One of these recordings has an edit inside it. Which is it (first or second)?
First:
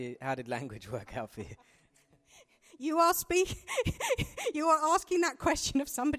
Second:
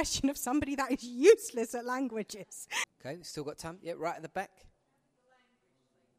second